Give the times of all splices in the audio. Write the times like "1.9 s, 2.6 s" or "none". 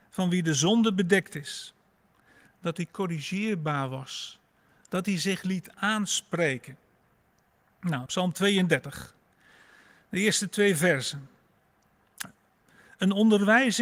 2.5 s, 8.1 s